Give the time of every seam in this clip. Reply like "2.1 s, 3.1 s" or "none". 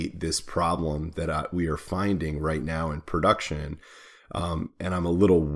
none